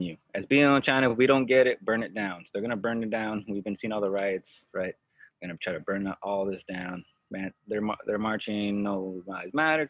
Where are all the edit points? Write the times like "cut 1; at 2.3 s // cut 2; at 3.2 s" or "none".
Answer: none

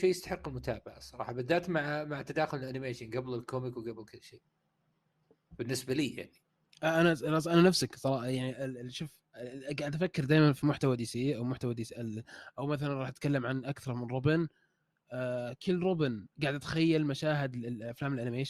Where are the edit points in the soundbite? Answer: cut 1; at 16.3 s

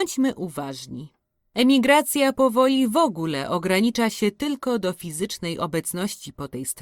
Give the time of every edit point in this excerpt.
cut 1; at 1.4 s

